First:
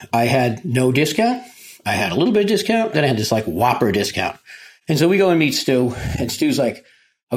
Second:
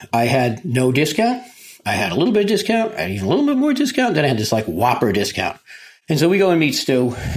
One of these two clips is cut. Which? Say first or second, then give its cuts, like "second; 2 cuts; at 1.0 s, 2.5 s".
first; 1 cut; at 2.9 s